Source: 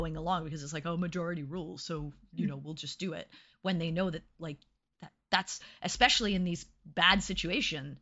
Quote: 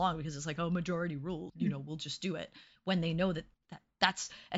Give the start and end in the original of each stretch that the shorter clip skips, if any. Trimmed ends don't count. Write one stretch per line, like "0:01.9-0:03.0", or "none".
0:01.8-0:02.3
0:04.3-0:04.8